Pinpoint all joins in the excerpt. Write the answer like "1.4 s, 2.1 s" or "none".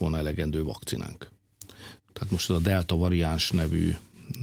2.0 s